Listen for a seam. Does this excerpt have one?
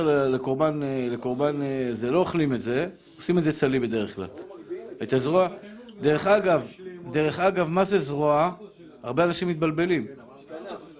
no; 0 cuts

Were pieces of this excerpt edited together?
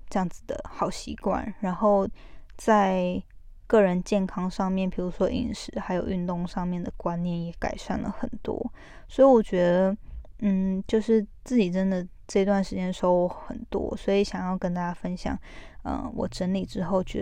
no; 0 cuts

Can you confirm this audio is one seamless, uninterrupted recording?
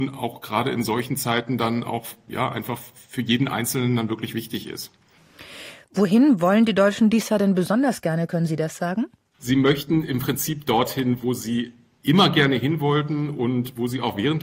no; 1 cut; at 9.4 s

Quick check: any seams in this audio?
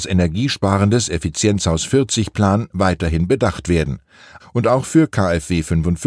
yes; 1 cut; at 4.4 s

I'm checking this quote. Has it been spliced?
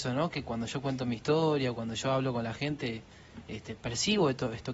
no; 0 cuts

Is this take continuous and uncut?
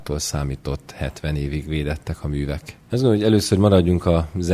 no; 1 cut; at 2.9 s

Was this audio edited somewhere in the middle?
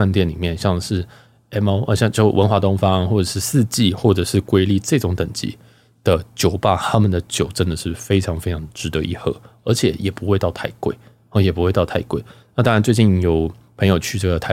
no; 0 cuts

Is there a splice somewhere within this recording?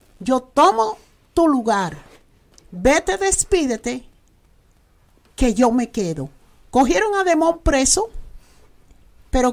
no; 0 cuts

